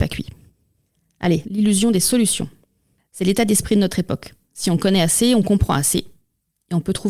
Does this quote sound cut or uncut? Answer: cut